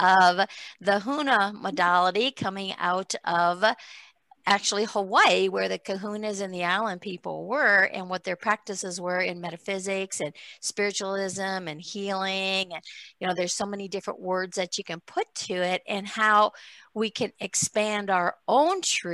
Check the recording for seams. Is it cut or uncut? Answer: uncut